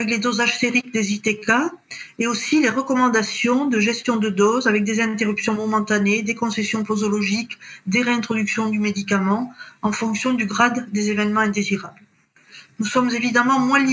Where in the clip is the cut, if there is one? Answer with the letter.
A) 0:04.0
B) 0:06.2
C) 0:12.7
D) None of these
D